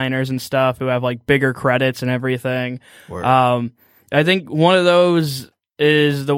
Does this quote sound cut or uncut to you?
uncut